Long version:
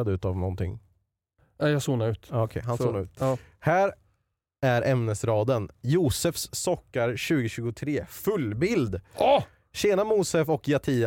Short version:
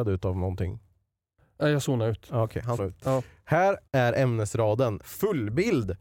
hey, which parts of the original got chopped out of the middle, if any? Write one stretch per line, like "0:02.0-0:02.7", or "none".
0:02.8-0:02.9
0:04.0-0:04.6
0:05.7-0:08.1